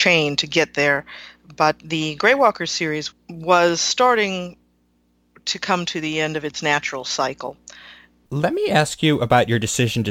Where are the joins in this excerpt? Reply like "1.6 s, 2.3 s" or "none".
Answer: 3.1 s, 8.2 s